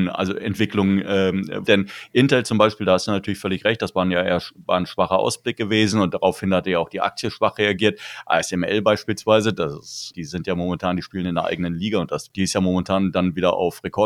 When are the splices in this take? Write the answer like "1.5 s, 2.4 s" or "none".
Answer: 1.7 s, 10.1 s, 12.3 s